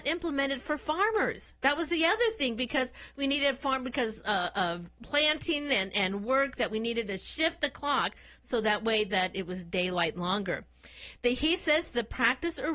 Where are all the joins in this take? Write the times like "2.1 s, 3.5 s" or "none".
none